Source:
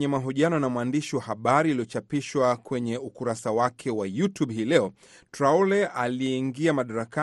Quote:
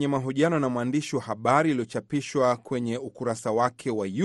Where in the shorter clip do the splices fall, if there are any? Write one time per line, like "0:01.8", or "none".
none